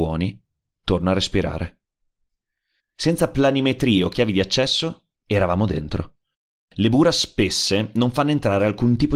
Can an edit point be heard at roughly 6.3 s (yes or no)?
no